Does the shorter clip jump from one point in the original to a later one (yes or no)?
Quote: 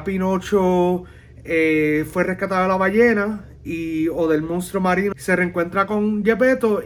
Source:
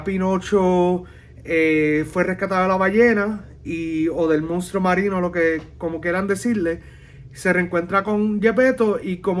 yes